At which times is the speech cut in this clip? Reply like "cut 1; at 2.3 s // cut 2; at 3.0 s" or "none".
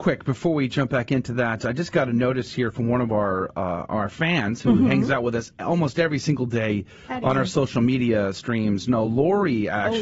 none